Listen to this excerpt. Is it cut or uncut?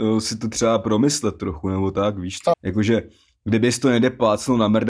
cut